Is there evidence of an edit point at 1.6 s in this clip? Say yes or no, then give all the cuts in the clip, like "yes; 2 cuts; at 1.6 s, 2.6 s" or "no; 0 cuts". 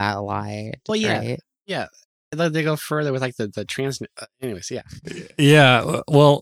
no; 0 cuts